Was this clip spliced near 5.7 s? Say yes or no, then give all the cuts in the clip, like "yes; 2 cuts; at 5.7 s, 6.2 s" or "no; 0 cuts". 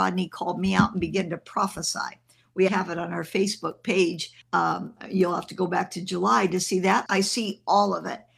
no; 3 cuts; at 2.7 s, 4.4 s, 7.1 s